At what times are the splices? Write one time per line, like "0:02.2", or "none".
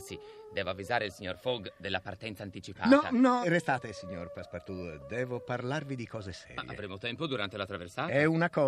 0:03.4